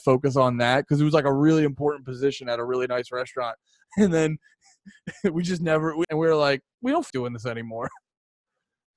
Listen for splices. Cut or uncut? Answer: cut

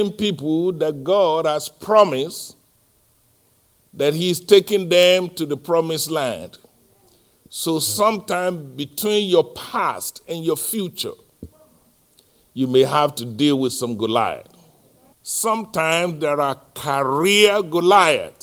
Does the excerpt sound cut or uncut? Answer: cut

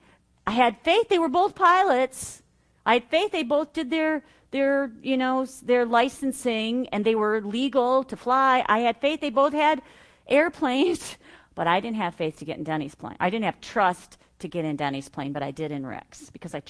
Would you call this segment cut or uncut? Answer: uncut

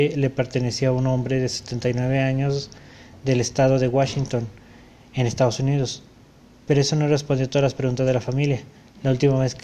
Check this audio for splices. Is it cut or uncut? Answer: uncut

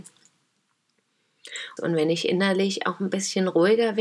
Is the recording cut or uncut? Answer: cut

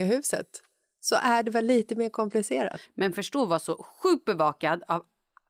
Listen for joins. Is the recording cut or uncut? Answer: cut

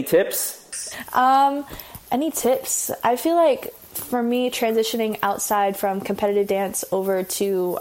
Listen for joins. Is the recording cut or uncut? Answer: cut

